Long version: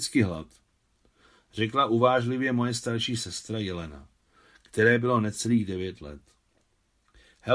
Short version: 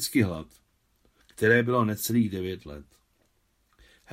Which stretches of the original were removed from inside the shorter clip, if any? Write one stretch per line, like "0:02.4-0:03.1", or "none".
0:01.2-0:04.6